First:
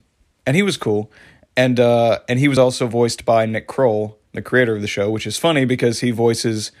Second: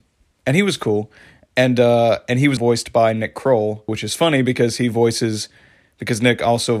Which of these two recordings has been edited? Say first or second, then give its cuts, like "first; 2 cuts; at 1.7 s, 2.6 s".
second; 2 cuts; at 2.6 s, 3.9 s